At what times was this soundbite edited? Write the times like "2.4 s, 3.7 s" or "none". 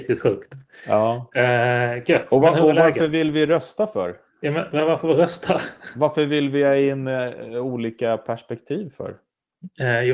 none